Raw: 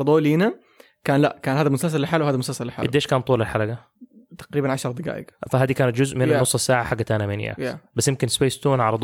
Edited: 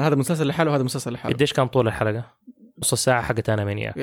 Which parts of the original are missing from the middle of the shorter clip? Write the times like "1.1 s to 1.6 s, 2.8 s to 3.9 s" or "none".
4.4 s to 6.4 s